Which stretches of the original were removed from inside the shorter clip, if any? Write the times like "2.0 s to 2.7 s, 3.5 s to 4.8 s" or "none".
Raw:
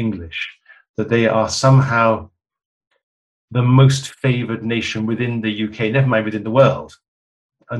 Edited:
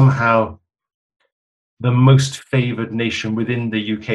none